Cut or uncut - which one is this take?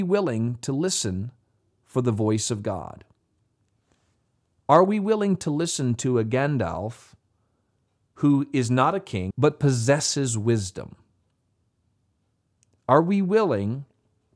cut